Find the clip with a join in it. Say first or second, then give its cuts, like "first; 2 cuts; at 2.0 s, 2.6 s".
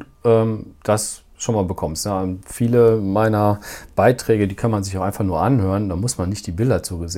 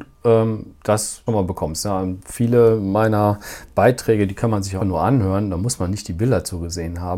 second; 2 cuts; at 1.3 s, 4.8 s